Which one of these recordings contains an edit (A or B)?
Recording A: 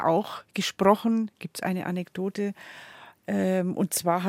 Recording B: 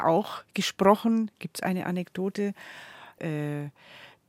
B